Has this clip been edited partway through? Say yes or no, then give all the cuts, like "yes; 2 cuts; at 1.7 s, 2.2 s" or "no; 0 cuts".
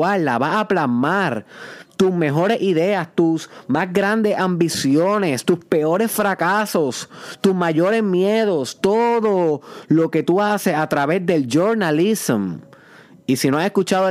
no; 0 cuts